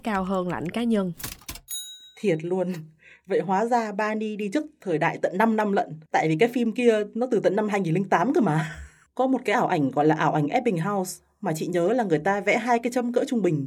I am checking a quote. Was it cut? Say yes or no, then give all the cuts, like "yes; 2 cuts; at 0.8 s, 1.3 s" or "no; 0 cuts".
yes; 2 cuts; at 6.1 s, 9.1 s